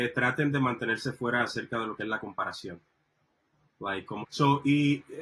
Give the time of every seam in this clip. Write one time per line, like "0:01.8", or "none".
0:04.2